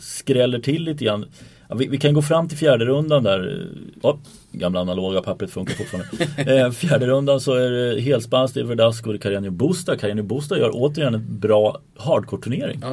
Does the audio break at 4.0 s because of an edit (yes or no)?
yes